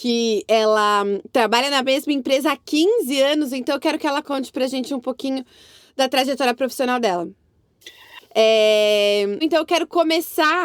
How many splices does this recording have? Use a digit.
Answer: 2